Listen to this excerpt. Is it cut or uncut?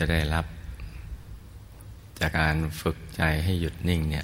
cut